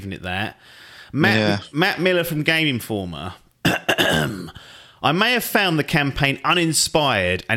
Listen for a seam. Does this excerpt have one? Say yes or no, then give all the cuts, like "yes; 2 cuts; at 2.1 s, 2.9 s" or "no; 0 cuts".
no; 0 cuts